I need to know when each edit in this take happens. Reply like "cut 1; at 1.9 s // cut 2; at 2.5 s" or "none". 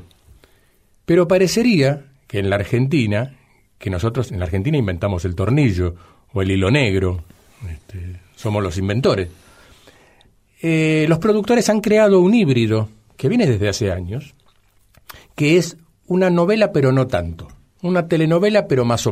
cut 1; at 4.3 s